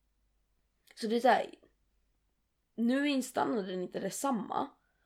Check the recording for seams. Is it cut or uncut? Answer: uncut